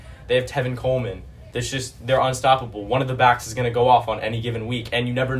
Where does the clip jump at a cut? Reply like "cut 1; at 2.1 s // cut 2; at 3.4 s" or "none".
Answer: cut 1; at 1.5 s

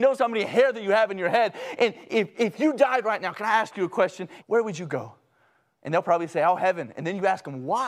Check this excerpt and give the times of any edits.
cut 1; at 4.4 s

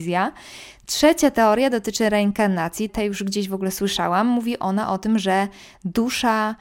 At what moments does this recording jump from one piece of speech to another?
cut 1; at 2.9 s

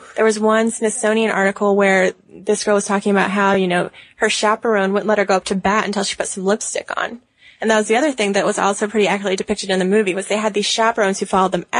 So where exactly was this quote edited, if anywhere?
none

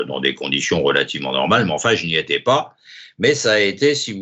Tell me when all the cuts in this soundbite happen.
none

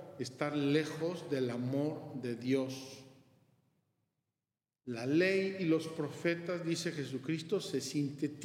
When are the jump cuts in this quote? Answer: none

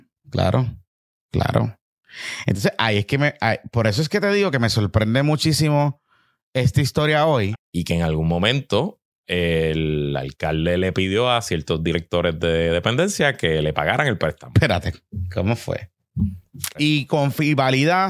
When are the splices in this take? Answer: cut 1; at 7.5 s // cut 2; at 9.2 s // cut 3; at 16.7 s

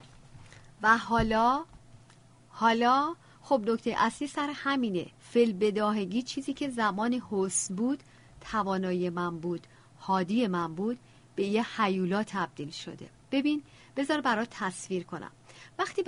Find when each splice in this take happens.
cut 1; at 5.1 s

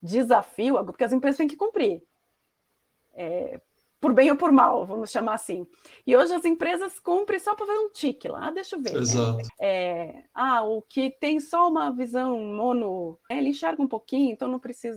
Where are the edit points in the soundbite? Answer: cut 1; at 9.5 s // cut 2; at 13.3 s

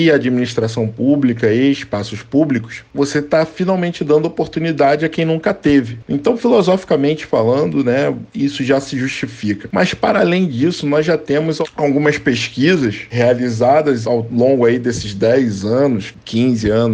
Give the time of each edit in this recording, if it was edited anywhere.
none

